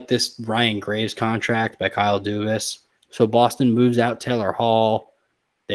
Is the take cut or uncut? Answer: cut